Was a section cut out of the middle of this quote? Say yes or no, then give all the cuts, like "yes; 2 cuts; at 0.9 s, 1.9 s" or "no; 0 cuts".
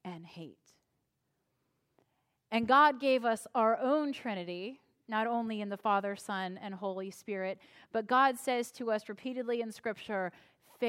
no; 0 cuts